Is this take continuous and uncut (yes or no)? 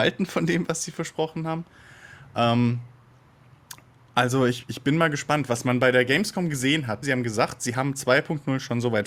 no